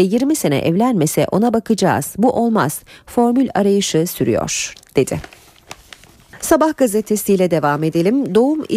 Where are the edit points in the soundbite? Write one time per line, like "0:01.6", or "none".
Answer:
none